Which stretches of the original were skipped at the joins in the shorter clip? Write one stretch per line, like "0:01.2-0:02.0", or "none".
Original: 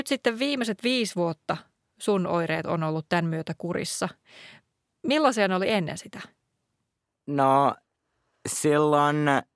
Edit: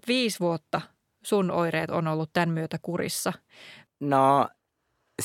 0:04.6-0:07.1